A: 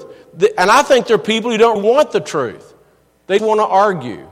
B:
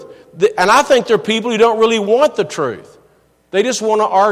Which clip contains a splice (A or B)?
A